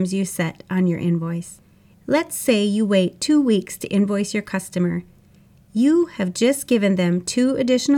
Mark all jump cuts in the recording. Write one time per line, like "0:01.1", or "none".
none